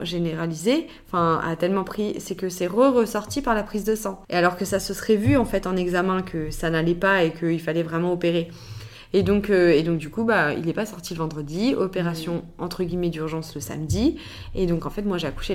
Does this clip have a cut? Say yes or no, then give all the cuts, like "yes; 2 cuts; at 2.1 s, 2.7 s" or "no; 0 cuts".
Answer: yes; 1 cut; at 4.2 s